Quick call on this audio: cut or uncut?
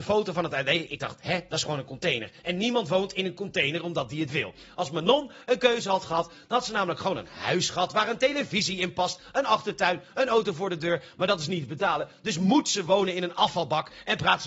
uncut